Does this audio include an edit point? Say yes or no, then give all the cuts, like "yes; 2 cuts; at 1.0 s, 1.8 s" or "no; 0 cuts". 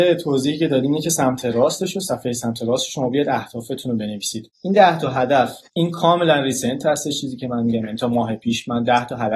yes; 1 cut; at 5.7 s